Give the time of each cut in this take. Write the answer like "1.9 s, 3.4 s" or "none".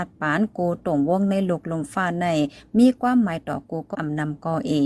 3.9 s